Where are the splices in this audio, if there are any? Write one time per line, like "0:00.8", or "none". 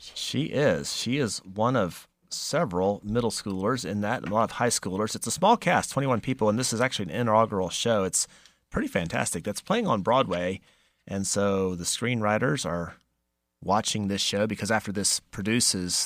none